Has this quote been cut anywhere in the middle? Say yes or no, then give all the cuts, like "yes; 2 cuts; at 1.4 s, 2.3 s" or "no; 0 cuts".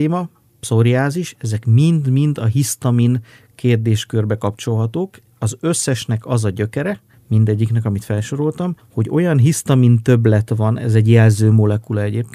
no; 0 cuts